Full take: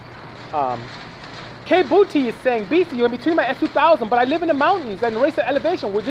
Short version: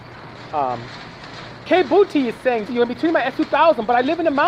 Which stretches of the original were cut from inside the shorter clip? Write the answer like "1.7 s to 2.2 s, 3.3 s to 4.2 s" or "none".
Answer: 2.7 s to 2.9 s